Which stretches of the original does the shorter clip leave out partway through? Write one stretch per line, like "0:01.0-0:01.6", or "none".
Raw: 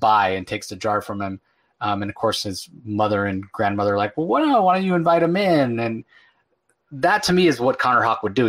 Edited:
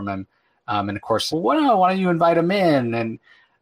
0:02.4-0:04.2